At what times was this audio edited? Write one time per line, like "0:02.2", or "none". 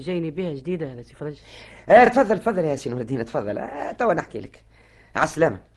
none

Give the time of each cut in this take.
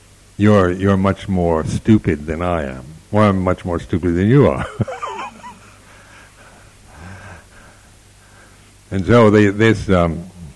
none

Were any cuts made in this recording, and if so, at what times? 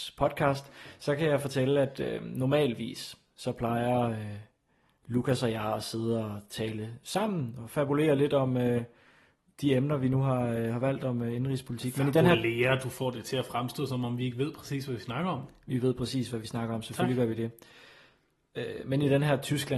none

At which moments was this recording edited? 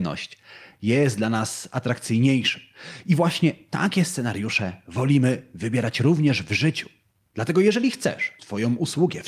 0:08.4

